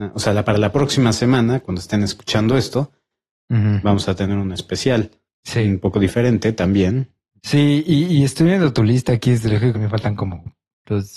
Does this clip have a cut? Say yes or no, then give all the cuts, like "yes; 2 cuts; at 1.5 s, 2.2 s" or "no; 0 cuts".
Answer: yes; 2 cuts; at 7.4 s, 9.7 s